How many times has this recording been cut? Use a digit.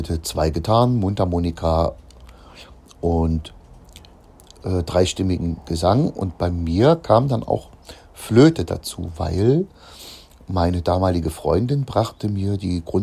0